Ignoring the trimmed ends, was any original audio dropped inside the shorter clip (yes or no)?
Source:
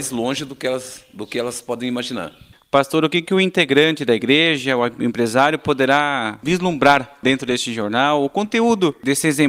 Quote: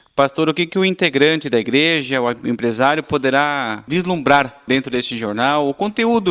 no